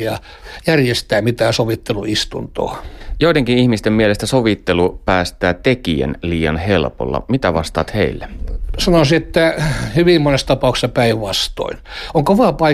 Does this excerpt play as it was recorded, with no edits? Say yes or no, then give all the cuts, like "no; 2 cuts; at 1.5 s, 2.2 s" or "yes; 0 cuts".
yes; 0 cuts